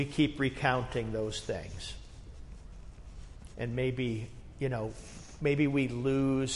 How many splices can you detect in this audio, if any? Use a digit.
1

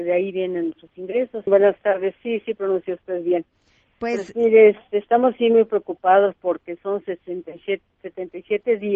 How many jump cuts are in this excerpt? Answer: 1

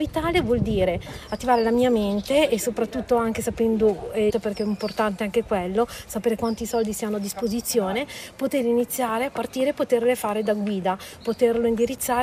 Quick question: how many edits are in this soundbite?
2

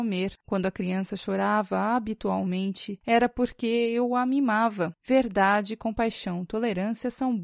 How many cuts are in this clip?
1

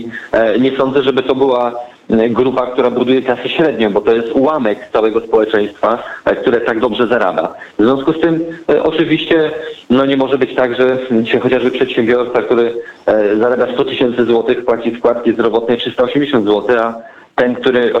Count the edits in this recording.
0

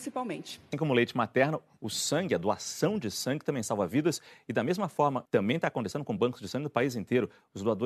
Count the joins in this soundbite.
1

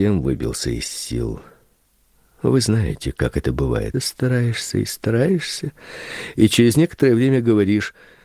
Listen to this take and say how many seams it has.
1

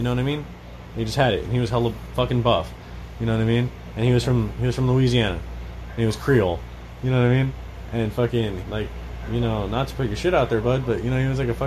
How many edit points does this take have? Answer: 1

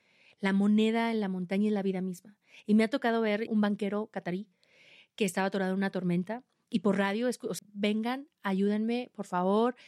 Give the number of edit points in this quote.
2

